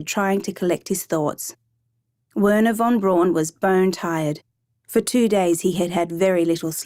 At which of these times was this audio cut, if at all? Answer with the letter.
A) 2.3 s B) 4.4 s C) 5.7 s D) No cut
D